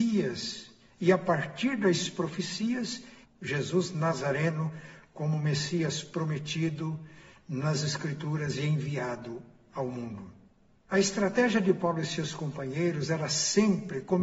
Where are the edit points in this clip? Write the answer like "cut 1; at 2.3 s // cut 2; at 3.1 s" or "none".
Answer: cut 1; at 3.2 s // cut 2; at 10.9 s

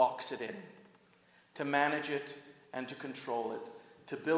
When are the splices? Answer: none

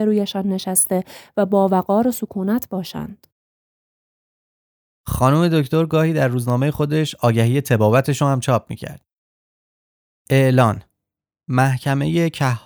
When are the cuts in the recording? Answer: none

